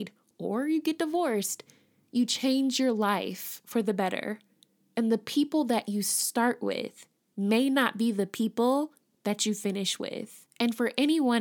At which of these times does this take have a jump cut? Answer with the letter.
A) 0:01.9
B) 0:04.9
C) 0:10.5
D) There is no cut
C